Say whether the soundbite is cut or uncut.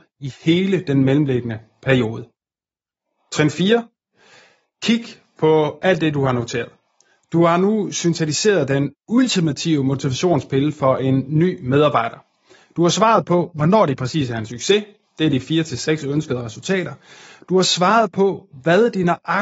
uncut